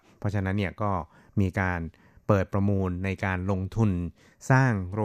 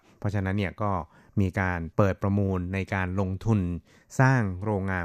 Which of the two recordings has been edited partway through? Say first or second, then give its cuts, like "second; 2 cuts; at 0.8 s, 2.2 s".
second; 1 cut; at 1.9 s